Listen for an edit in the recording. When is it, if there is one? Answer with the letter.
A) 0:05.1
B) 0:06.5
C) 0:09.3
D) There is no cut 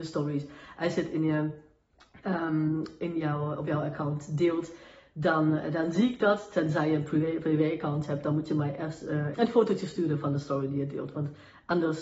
C